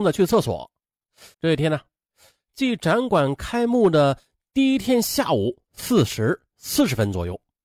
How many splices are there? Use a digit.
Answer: 1